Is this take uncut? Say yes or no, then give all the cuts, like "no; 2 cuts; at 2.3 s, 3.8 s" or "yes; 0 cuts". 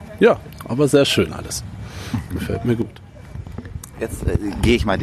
yes; 0 cuts